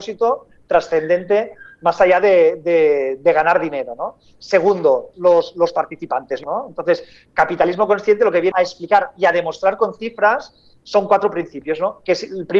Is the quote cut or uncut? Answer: cut